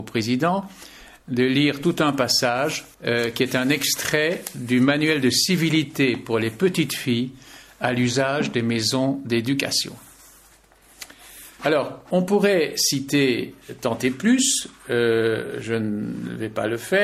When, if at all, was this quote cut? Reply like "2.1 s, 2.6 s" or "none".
2.9 s, 11.6 s